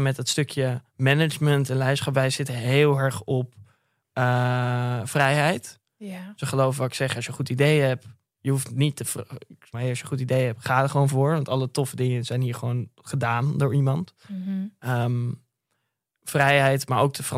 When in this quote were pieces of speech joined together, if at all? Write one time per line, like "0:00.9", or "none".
0:09.7

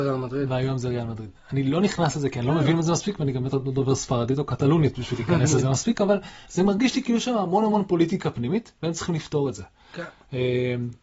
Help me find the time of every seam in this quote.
none

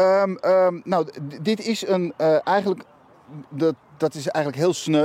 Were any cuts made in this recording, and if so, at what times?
none

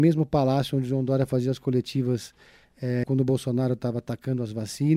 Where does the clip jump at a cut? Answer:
0:03.0

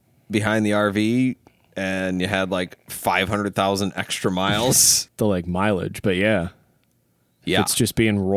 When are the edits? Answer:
0:05.1

